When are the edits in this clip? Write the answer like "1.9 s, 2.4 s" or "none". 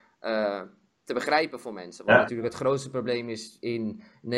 none